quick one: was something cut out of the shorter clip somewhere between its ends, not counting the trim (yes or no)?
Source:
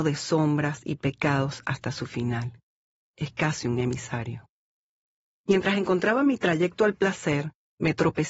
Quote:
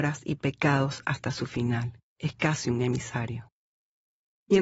yes